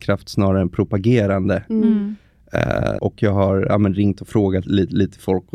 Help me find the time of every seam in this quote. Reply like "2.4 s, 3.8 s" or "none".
3.0 s, 4.6 s

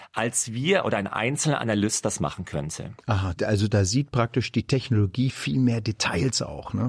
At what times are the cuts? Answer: none

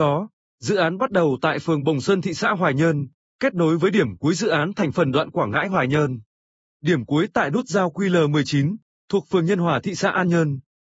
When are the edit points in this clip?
none

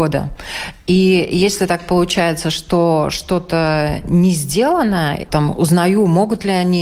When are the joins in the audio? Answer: 5.3 s

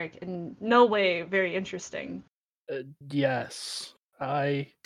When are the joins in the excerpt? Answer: 3.0 s

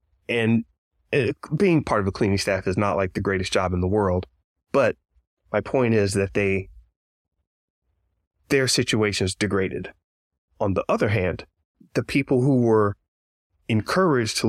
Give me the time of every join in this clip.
none

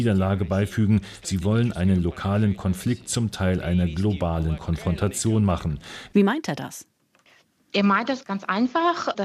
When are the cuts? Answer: 6.1 s

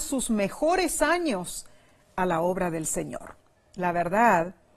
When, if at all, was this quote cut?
3.6 s

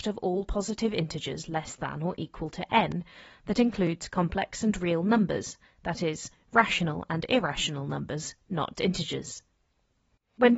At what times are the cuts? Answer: 8.8 s

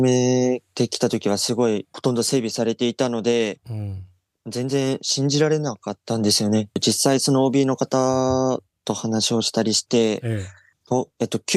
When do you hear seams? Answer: 6.7 s

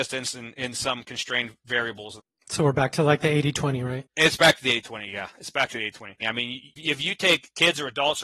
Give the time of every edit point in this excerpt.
6.2 s

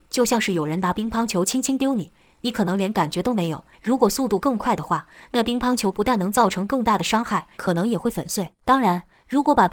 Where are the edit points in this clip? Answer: 3.7 s, 7.5 s

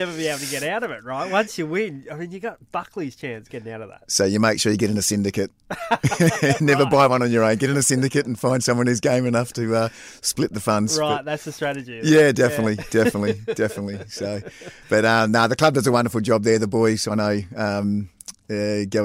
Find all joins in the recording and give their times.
none

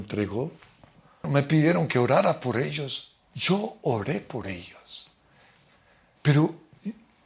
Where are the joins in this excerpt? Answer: 1.2 s, 6.2 s

